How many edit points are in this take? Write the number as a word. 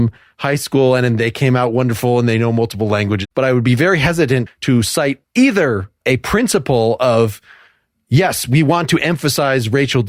one